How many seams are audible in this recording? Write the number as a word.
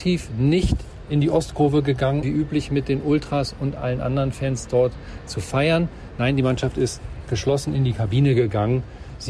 one